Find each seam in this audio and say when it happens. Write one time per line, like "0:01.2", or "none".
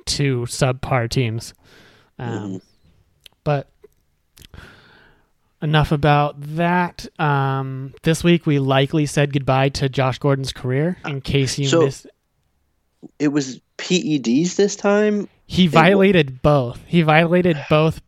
0:11.0